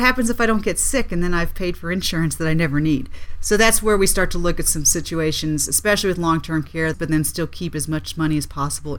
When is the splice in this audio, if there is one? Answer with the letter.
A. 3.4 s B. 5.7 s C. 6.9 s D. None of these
C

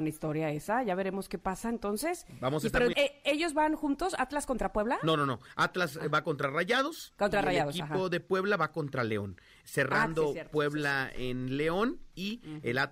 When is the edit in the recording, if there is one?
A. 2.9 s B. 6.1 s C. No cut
A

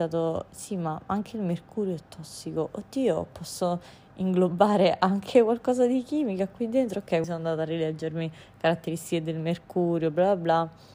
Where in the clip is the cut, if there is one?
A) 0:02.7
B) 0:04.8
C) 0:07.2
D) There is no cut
C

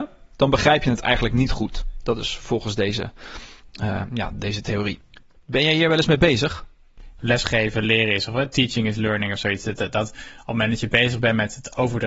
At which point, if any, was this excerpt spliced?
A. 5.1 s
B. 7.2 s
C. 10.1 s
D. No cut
B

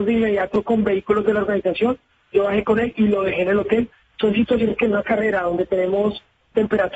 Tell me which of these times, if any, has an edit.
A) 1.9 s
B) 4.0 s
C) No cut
B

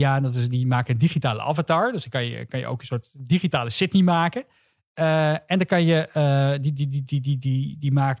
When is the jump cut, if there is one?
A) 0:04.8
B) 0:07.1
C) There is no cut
B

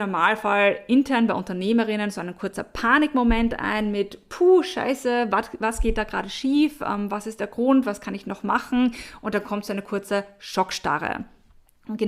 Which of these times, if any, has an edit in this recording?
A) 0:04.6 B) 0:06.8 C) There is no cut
C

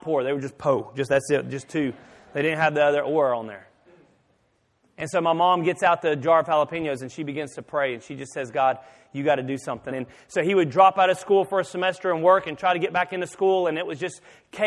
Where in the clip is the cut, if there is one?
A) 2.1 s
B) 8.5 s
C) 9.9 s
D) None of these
C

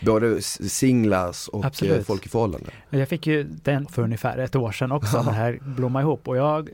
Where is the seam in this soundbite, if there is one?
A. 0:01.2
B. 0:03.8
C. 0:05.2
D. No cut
B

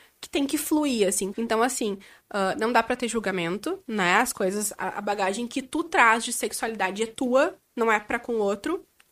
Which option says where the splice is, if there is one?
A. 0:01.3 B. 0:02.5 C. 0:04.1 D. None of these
A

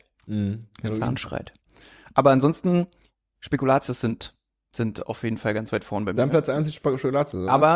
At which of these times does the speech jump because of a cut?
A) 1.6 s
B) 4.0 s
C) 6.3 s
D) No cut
D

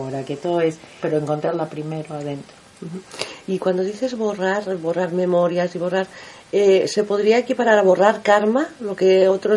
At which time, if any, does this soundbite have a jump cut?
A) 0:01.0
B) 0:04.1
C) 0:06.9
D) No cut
A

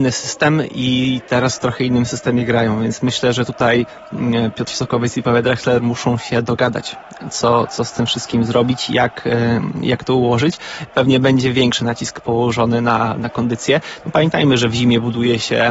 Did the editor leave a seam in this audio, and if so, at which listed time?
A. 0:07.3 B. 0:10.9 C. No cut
C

